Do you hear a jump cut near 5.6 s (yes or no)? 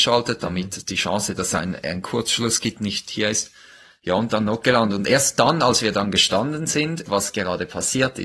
no